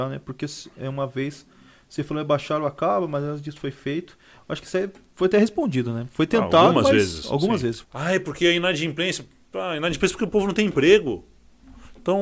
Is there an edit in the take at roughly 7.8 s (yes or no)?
yes